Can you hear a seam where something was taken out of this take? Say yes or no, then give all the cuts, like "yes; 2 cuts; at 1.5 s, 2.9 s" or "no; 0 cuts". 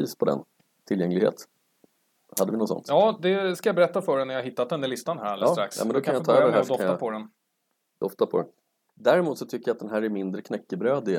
yes; 1 cut; at 8.9 s